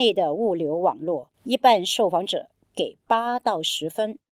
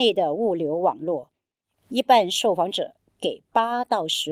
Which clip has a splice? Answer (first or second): first